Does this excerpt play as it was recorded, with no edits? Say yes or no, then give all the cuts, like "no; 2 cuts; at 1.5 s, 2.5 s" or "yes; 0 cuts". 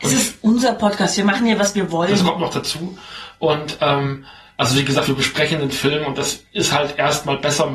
yes; 0 cuts